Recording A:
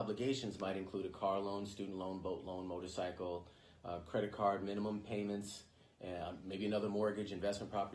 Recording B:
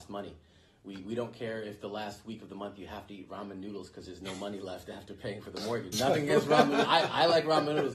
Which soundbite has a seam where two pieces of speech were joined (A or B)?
B